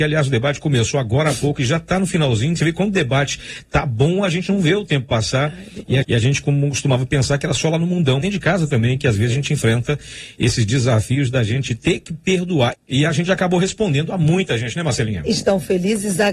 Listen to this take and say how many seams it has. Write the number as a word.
three